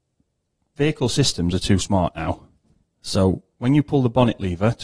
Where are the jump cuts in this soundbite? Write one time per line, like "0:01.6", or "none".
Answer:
0:02.8